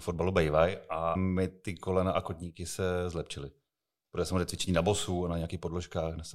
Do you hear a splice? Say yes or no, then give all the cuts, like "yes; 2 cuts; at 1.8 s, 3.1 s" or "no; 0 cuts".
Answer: yes; 1 cut; at 1.1 s